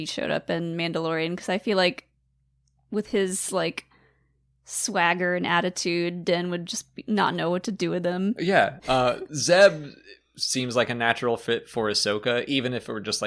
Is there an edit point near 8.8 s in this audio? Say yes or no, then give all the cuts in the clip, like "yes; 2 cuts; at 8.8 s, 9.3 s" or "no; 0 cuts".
yes; 1 cut; at 8.8 s